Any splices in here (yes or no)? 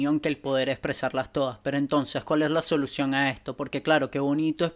no